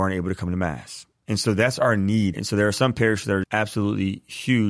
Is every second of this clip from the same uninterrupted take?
no; 2 cuts; at 2.3 s, 3.4 s

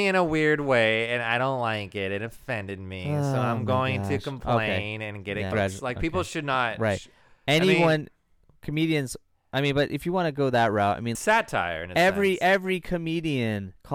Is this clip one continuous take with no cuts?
no; 2 cuts; at 5.5 s, 11.1 s

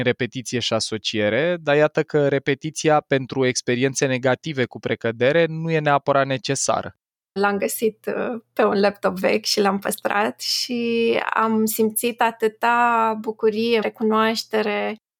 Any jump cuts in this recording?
yes; 2 cuts; at 7.4 s, 13.8 s

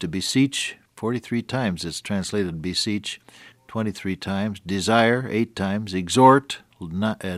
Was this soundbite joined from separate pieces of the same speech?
yes; 1 cut; at 3.5 s

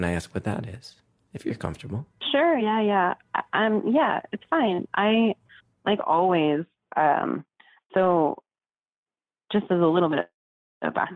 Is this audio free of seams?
yes; 0 cuts

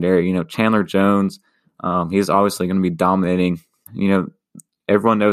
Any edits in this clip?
yes; 1 cut; at 3.9 s

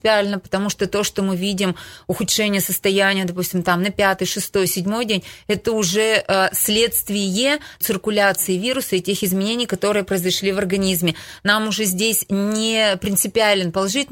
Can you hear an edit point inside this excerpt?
yes; 1 cut; at 7.8 s

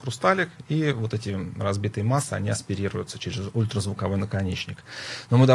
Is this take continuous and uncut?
yes; 0 cuts

